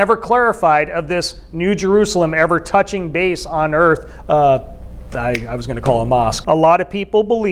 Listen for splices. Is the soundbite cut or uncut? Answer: cut